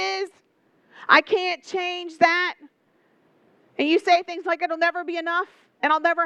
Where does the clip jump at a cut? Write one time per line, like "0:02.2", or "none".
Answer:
none